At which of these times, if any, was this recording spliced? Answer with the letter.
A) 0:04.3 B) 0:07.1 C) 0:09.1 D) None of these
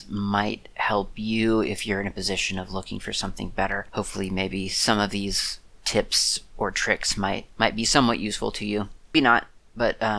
C